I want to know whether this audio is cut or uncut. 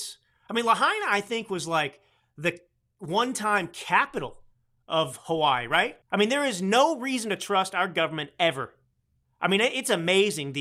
cut